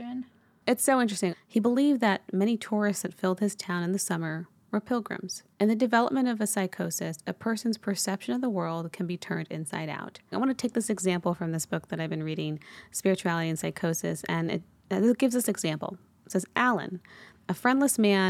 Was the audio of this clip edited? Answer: yes; 3 cuts; at 1.3 s, 5.5 s, 10.3 s

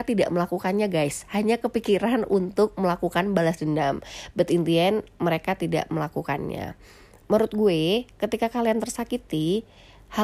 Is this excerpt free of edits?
yes; 0 cuts

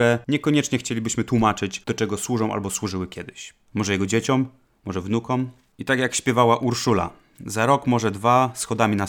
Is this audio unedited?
no; 1 cut; at 3.7 s

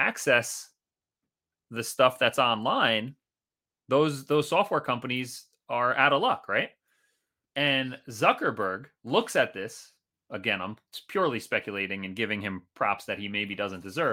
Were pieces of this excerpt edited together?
yes; 1 cut; at 7.5 s

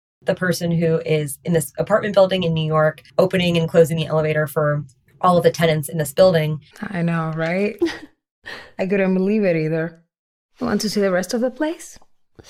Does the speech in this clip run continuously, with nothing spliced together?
no; 2 cuts; at 3.1 s, 6.7 s

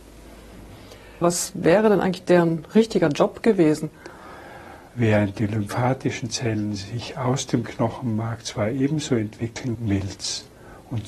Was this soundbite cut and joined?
yes; 3 cuts; at 1.2 s, 4.9 s, 9.7 s

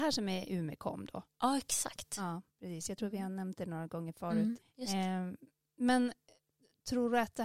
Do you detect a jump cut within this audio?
yes; 2 cuts; at 2.5 s, 4.6 s

